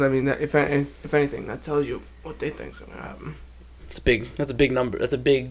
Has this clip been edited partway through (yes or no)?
yes